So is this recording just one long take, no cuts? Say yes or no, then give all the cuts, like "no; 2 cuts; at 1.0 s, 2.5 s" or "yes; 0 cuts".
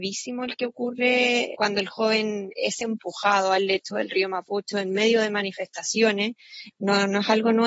no; 2 cuts; at 1.5 s, 6.7 s